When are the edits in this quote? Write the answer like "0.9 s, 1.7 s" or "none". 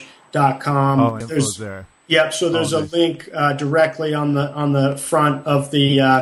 1.2 s